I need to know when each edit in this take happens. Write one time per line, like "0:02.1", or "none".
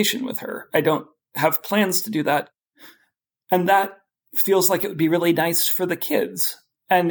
none